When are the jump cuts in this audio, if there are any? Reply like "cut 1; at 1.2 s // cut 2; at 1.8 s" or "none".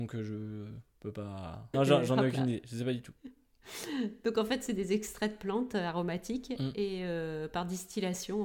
cut 1; at 1.7 s